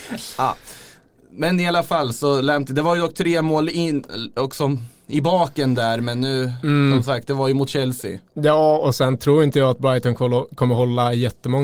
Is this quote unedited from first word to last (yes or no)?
yes